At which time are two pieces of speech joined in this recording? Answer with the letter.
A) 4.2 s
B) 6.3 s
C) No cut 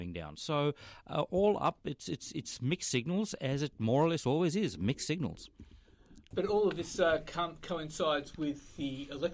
B